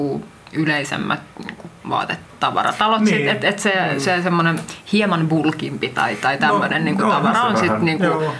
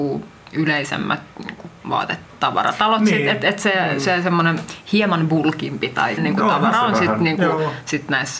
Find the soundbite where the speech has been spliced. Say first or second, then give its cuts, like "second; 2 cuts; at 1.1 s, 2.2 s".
second; 1 cut; at 6.2 s